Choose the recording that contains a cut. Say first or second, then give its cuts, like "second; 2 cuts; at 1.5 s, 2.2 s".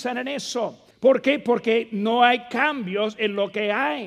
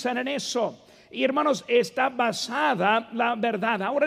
first; 1 cut; at 0.9 s